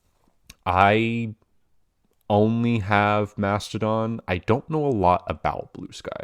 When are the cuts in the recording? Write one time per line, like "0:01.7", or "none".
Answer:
none

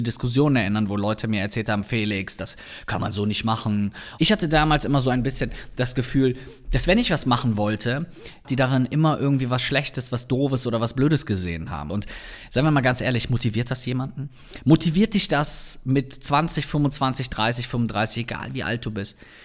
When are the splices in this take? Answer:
0:04.2
0:08.4
0:11.9

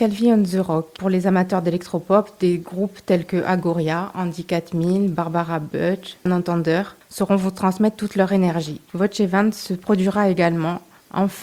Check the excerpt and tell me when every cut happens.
0:06.3
0:08.9

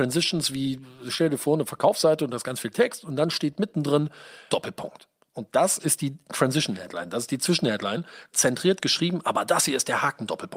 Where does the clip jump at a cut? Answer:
0:04.5
0:08.3

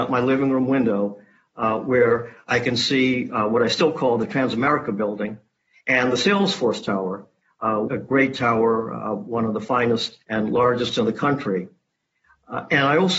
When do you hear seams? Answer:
0:05.7
0:07.9
0:10.2

